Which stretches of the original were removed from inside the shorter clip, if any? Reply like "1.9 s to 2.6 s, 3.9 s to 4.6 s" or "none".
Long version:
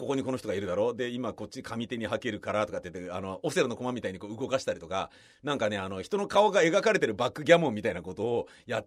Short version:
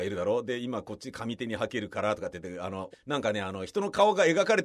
3.4 s to 5.3 s